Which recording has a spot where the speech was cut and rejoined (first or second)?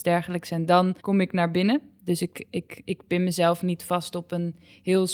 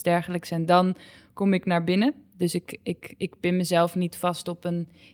first